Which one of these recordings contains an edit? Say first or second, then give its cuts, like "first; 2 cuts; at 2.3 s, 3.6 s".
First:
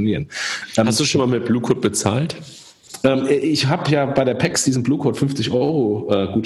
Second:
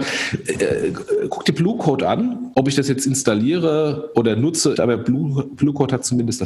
second; 2 cuts; at 2.5 s, 4.7 s